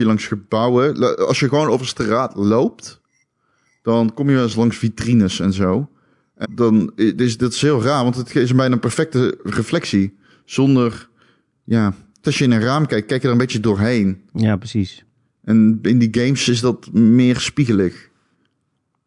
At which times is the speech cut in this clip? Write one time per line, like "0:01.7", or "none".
0:06.4
0:12.2

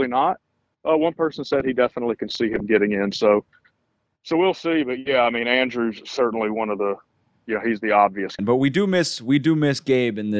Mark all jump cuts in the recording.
0:08.4

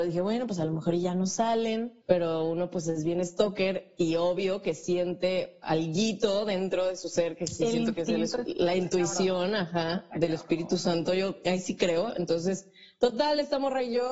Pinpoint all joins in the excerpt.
0:02.0

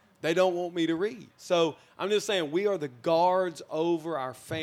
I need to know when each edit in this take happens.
0:01.3

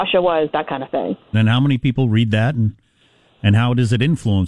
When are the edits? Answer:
0:01.3

